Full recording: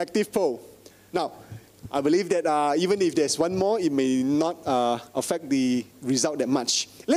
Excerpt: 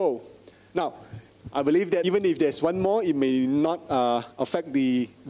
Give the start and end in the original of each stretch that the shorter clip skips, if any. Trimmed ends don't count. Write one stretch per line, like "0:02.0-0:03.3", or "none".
0:02.4-0:02.8